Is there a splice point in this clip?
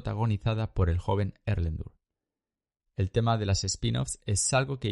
no; 0 cuts

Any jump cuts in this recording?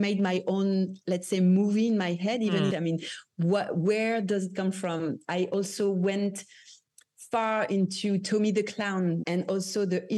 yes; 2 cuts; at 2.7 s, 9.2 s

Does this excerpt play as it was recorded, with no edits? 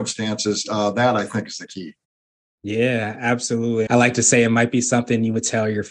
no; 1 cut; at 3.9 s

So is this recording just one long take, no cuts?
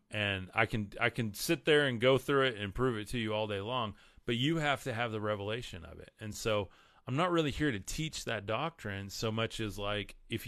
yes; 0 cuts

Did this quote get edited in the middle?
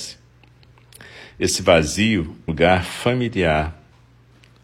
yes; 1 cut; at 2.5 s

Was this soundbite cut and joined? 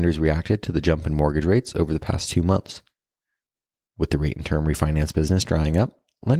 no; 0 cuts

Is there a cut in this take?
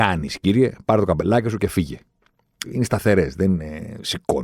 yes; 1 cut; at 2.6 s

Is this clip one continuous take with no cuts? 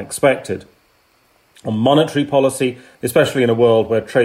no; 1 cut; at 2.9 s

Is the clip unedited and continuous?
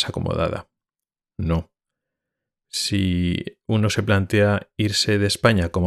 no; 1 cut; at 1.2 s

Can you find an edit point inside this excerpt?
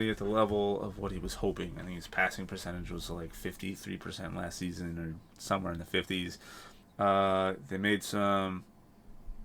yes; 1 cut; at 6.8 s

